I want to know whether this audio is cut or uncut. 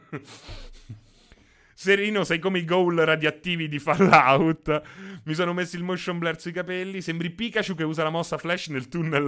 uncut